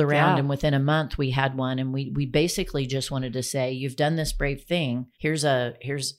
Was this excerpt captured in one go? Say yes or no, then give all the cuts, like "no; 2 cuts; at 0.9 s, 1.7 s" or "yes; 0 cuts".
no; 1 cut; at 5.1 s